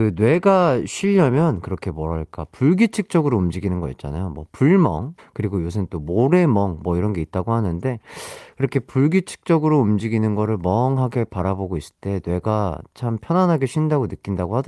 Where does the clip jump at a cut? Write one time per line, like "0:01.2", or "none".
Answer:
0:05.2